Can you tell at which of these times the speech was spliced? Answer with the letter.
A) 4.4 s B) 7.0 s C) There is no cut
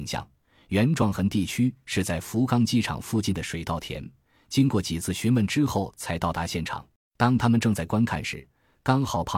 B